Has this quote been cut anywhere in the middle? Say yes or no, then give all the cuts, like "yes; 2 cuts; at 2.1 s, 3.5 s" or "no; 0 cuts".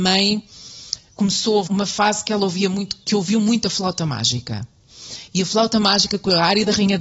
yes; 1 cut; at 1.7 s